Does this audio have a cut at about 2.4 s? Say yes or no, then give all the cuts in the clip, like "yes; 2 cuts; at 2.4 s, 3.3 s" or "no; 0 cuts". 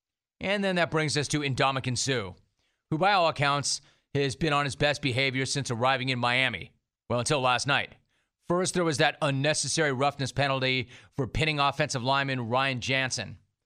no; 0 cuts